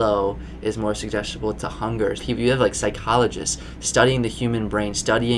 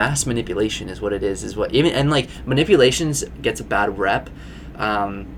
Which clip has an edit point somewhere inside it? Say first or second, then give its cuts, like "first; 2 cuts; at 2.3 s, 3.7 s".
first; 1 cut; at 2.2 s